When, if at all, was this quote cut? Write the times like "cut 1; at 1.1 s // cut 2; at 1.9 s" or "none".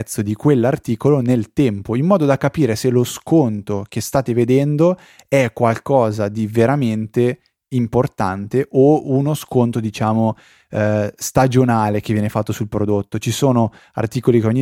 none